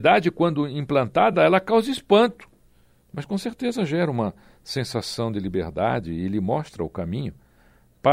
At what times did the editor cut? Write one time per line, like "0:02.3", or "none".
none